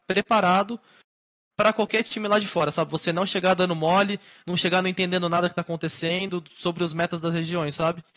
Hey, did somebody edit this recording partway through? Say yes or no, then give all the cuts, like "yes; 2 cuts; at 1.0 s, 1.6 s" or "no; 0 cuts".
no; 0 cuts